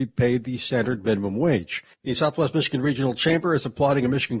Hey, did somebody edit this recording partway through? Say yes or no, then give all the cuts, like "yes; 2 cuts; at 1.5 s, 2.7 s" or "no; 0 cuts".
yes; 1 cut; at 1.9 s